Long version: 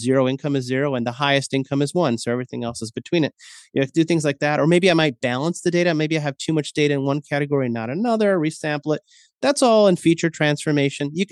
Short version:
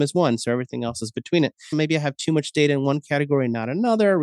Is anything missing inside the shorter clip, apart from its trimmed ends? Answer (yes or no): yes